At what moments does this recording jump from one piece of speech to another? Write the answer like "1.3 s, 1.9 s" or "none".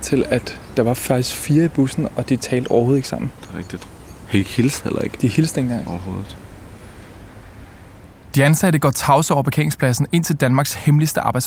none

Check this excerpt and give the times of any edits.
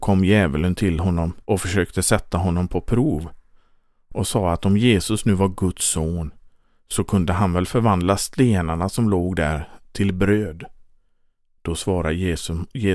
1.4 s

